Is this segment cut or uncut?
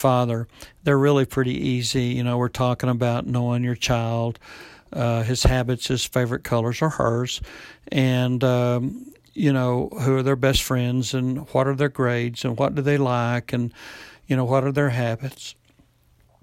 uncut